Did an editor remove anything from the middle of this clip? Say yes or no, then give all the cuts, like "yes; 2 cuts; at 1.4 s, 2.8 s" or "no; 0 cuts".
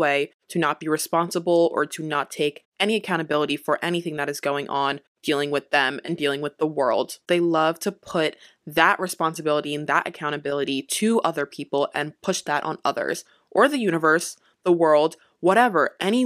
yes; 1 cut; at 7.3 s